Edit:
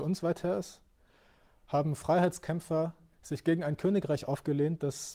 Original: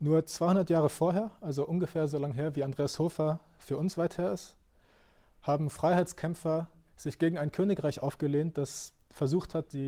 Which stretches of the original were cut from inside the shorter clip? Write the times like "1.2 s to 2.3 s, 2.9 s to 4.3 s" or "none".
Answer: none